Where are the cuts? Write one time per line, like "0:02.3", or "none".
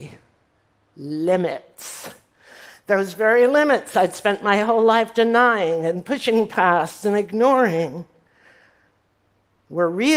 none